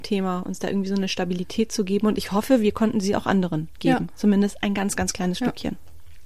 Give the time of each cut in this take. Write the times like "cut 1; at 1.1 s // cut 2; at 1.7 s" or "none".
none